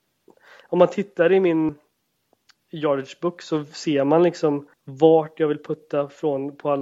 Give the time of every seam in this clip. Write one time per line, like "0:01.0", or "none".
0:01.7
0:04.7